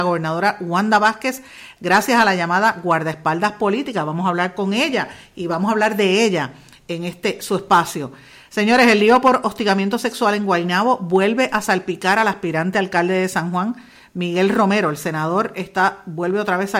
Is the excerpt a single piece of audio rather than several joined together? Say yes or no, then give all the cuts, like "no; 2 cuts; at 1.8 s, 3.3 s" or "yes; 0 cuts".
yes; 0 cuts